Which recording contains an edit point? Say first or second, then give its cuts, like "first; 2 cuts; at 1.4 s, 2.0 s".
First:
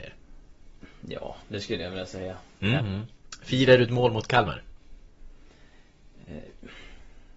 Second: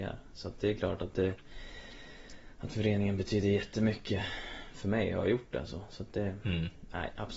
first; 1 cut; at 2.8 s